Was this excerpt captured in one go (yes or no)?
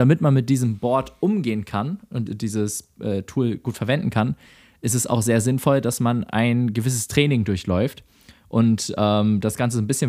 no